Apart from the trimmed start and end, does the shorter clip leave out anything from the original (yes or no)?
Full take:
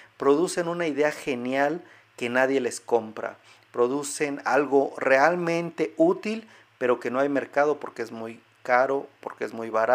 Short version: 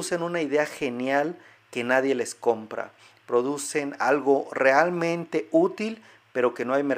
no